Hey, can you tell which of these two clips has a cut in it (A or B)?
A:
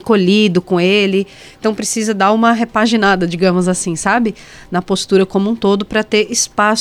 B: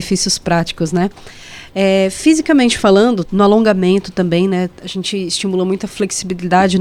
B